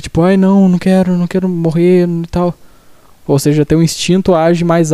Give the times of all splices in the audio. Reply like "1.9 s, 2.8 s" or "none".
3.2 s